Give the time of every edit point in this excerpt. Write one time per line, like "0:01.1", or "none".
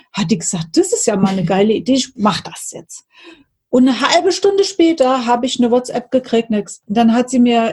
none